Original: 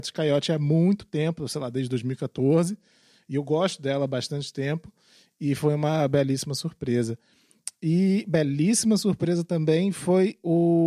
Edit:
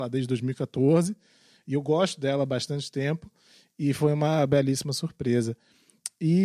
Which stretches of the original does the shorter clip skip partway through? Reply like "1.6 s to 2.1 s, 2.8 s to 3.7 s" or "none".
none